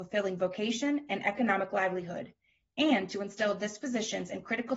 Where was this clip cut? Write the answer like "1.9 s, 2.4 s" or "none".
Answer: none